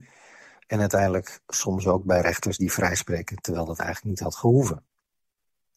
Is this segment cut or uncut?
uncut